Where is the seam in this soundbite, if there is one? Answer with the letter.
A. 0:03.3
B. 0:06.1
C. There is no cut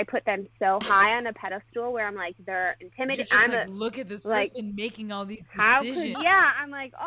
B